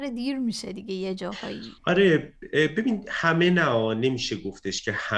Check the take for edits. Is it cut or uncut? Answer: cut